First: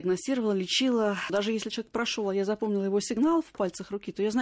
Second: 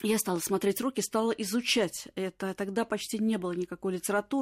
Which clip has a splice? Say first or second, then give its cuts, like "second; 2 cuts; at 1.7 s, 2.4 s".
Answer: first; 1 cut; at 1.3 s